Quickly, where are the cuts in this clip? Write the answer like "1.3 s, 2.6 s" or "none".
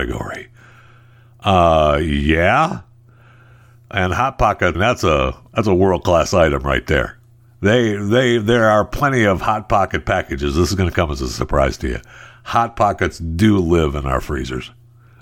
4.7 s